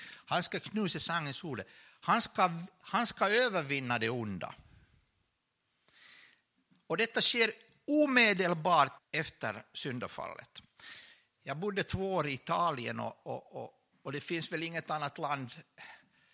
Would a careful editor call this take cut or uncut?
cut